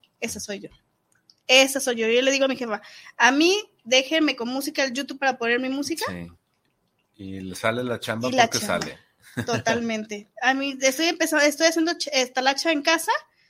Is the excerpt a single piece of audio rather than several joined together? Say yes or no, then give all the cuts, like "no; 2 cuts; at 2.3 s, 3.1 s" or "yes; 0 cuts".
yes; 0 cuts